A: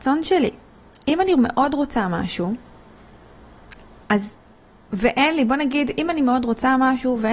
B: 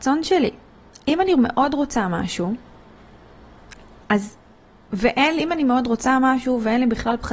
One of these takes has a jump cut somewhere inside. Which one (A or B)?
B